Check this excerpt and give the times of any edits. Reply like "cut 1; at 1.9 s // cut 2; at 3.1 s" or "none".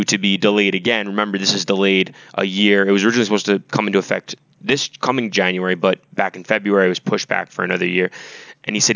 none

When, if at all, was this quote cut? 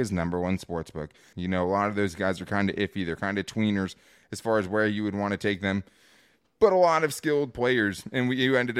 cut 1; at 1.3 s

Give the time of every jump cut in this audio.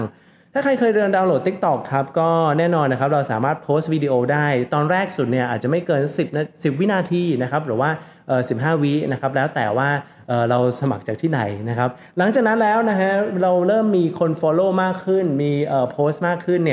none

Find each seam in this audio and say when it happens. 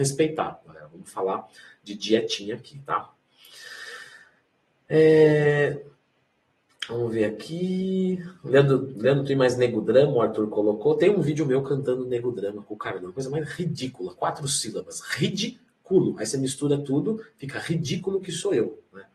none

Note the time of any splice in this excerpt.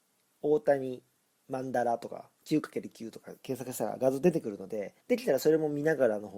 cut 1; at 5.0 s

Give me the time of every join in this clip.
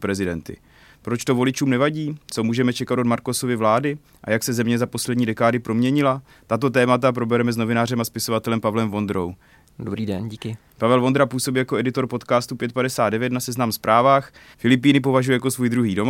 cut 1; at 9.7 s // cut 2; at 14.5 s

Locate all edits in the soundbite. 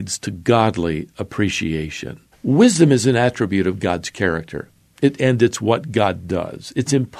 cut 1; at 2.3 s // cut 2; at 5.2 s

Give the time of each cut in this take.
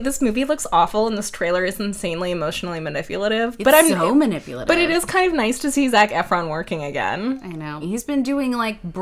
cut 1; at 7.8 s

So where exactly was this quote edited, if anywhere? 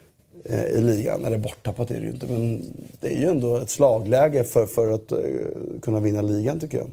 none

